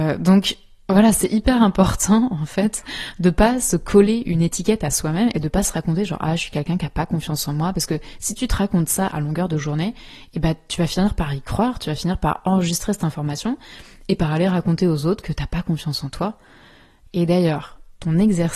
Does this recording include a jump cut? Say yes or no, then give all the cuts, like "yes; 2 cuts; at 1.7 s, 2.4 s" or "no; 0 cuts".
yes; 1 cut; at 17.1 s